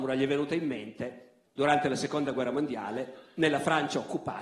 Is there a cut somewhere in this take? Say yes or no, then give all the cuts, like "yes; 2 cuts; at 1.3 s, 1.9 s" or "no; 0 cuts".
yes; 1 cut; at 1.5 s